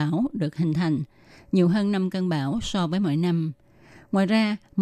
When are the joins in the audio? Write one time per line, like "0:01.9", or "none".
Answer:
none